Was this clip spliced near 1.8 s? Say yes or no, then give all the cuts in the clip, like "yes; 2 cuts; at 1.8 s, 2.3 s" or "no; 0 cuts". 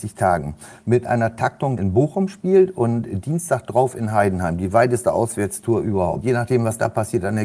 yes; 1 cut; at 1.8 s